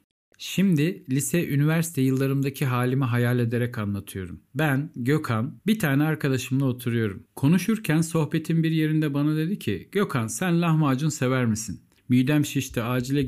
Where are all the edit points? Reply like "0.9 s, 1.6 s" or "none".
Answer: 7.3 s, 12.0 s